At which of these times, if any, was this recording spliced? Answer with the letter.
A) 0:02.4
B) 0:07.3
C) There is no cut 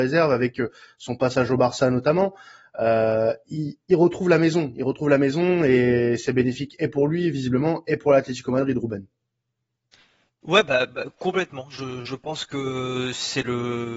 C